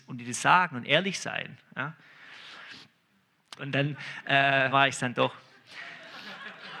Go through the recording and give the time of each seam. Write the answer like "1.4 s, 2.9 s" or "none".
3.6 s, 4.7 s